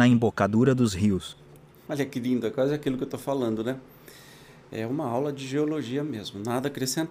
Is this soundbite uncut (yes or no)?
yes